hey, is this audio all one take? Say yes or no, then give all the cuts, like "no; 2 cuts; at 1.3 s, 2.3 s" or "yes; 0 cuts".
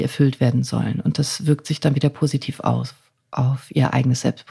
yes; 0 cuts